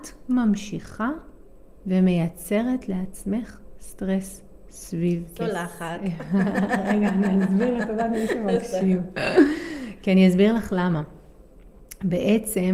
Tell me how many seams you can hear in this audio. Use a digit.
0